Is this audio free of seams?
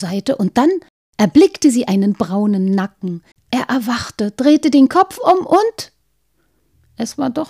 no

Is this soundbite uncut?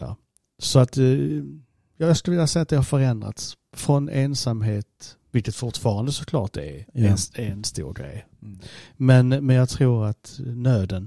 yes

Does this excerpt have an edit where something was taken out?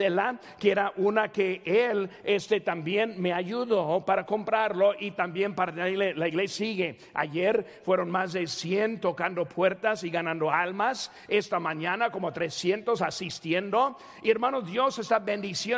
no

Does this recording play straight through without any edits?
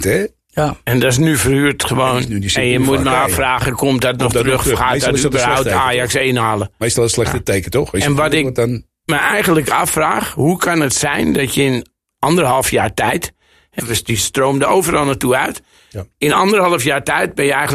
no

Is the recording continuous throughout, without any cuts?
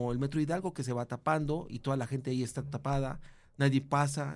yes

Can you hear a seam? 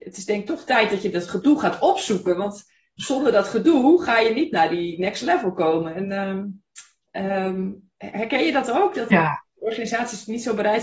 yes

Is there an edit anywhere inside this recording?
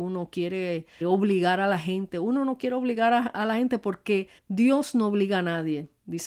yes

